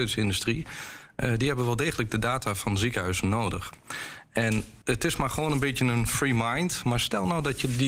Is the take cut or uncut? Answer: cut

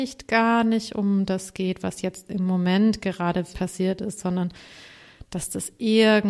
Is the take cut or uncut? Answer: cut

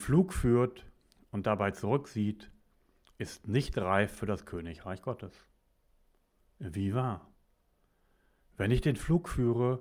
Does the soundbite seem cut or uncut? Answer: uncut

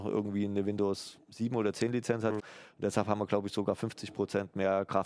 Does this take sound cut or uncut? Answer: cut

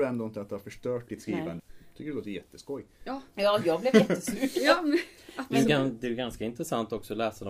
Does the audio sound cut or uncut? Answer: cut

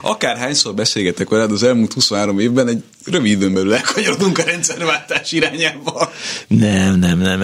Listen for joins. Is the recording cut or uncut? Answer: uncut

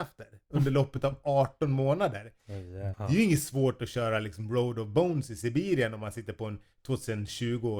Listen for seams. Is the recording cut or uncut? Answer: cut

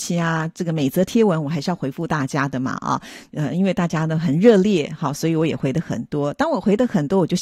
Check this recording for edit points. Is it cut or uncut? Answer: uncut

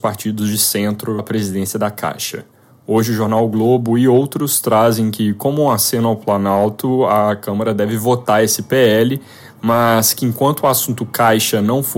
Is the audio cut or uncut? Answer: cut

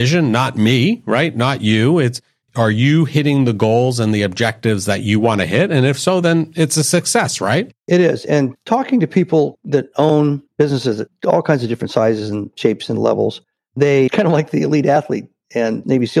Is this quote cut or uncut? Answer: uncut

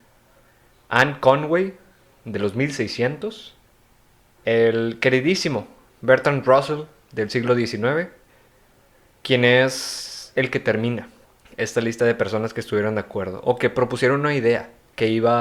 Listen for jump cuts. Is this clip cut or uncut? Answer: uncut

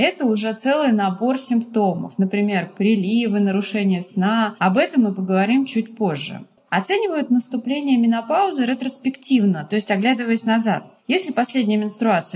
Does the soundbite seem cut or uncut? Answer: uncut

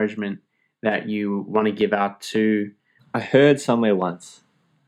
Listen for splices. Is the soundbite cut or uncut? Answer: cut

